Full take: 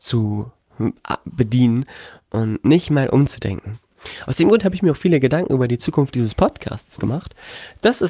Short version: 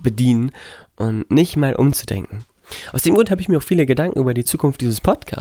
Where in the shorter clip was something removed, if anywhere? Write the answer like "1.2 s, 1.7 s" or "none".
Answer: none